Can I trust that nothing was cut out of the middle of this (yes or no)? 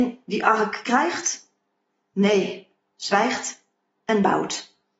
no